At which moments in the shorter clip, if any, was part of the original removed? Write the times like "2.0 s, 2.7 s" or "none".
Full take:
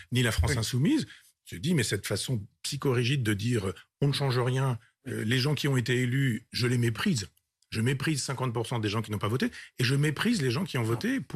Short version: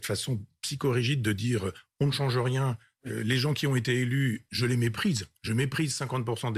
5.4 s